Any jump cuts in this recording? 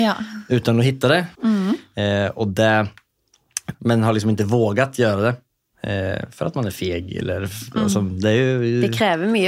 yes; 2 cuts; at 1.3 s, 3.7 s

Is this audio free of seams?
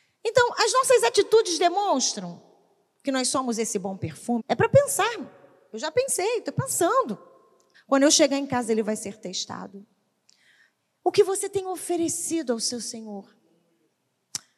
no; 2 cuts; at 4.4 s, 7.7 s

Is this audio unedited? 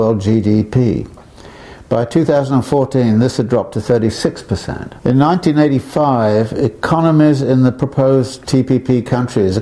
no; 2 cuts; at 5.0 s, 8.4 s

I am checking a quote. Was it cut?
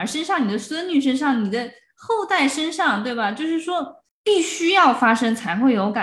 no; 0 cuts

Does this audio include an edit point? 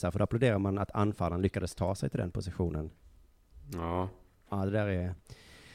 no; 0 cuts

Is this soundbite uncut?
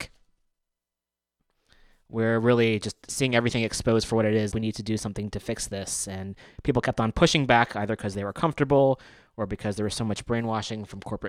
no; 1 cut; at 4.5 s

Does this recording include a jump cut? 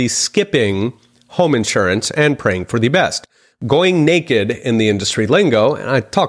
no; 0 cuts

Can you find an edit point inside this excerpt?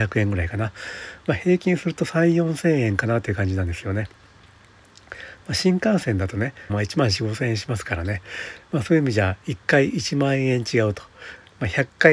yes; 1 cut; at 6.7 s

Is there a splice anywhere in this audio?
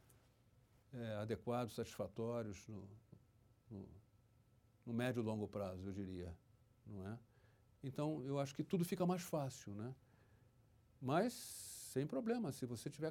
no; 0 cuts

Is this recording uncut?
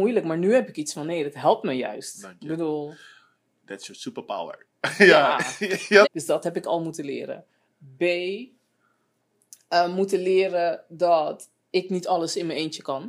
no; 1 cut; at 6.0 s

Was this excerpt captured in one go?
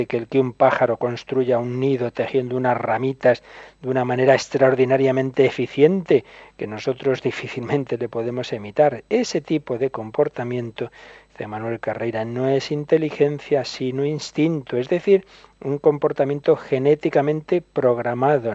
yes; 0 cuts

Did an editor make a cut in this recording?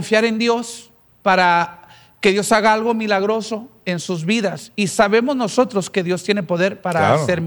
no; 0 cuts

